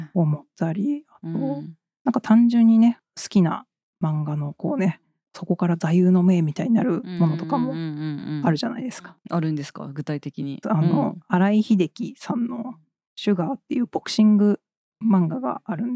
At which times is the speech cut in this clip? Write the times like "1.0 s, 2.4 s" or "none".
10.6 s